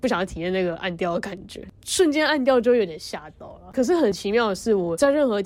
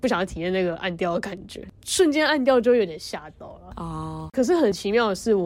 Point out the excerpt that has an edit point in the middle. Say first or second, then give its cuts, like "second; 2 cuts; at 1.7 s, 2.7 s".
first; 1 cut; at 3.7 s